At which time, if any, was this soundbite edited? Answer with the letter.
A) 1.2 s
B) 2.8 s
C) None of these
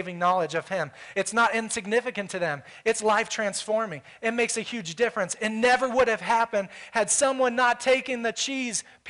C